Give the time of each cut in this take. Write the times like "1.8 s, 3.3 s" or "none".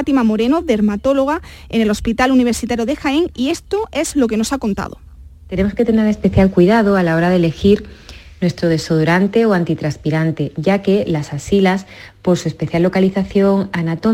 none